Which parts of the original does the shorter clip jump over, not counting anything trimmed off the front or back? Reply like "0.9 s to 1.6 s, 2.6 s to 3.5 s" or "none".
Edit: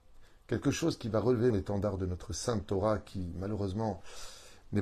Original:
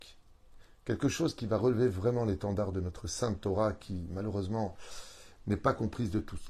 1.9 s to 2.2 s